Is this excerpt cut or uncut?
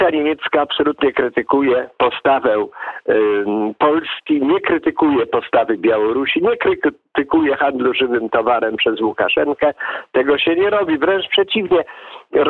uncut